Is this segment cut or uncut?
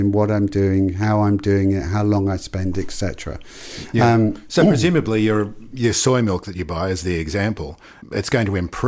uncut